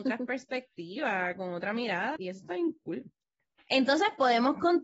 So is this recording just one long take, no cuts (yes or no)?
no